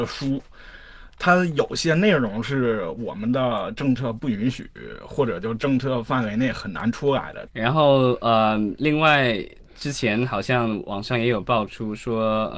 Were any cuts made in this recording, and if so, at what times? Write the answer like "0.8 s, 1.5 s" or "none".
7.5 s